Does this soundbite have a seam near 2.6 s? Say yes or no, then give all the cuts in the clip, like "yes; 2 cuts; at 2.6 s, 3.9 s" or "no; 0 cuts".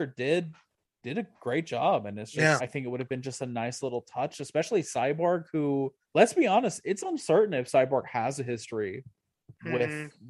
yes; 2 cuts; at 2.6 s, 6.0 s